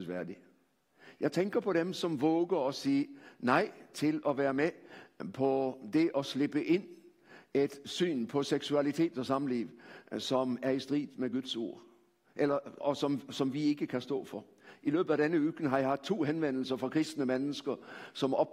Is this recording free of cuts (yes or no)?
no